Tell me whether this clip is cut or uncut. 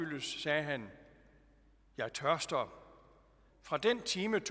cut